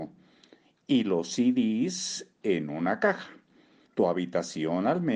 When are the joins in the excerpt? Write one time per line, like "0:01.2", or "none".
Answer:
0:03.9